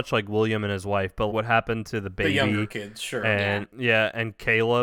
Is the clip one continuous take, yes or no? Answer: no